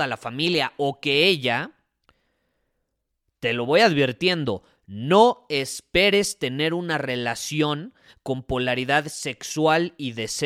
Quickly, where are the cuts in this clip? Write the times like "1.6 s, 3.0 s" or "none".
none